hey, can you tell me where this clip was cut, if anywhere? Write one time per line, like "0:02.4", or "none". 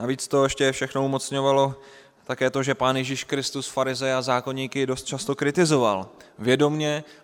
none